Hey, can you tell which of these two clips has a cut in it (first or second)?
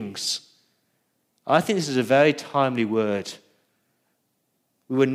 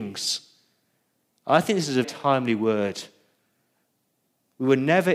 second